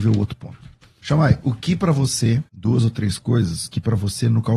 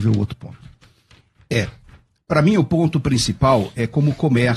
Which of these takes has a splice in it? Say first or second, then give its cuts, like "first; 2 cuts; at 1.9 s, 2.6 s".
first; 2 cuts; at 1.0 s, 2.5 s